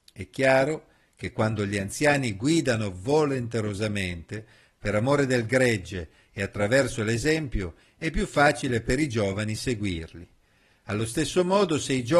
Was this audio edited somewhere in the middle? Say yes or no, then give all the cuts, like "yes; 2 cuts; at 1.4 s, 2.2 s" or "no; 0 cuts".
no; 0 cuts